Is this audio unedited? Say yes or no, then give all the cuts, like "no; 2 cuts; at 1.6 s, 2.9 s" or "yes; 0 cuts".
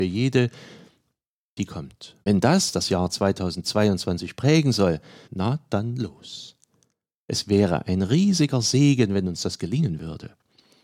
no; 2 cuts; at 2.2 s, 5.2 s